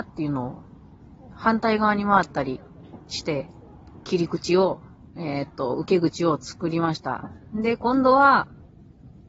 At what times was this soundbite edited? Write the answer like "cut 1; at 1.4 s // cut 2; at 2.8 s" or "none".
cut 1; at 4.0 s